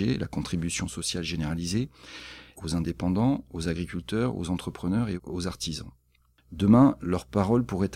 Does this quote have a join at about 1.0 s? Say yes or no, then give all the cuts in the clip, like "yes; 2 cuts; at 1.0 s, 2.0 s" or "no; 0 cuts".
no; 2 cuts; at 2.5 s, 6.3 s